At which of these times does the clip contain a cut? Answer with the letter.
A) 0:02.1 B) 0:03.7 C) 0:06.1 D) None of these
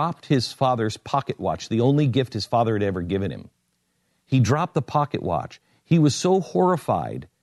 D